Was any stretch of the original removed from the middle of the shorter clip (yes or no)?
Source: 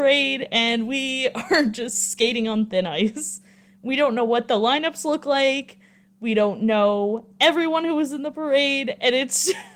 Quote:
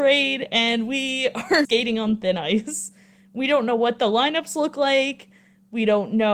yes